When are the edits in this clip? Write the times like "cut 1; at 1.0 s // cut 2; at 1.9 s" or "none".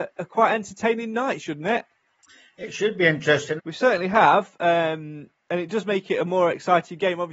cut 1; at 3.6 s